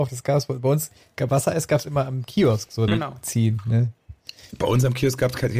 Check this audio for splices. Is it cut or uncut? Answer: cut